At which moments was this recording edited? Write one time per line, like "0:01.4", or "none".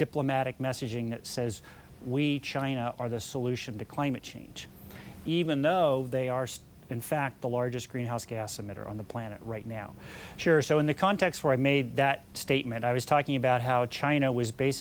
0:10.3